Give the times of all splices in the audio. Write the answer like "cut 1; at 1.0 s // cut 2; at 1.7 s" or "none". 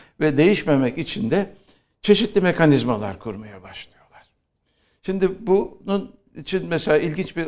none